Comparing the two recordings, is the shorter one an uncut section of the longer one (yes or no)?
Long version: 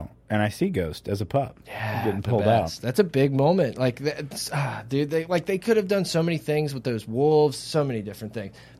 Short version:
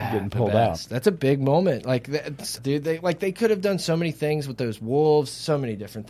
no